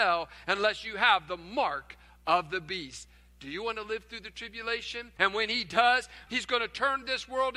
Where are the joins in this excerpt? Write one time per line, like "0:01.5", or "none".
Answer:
0:05.2
0:06.3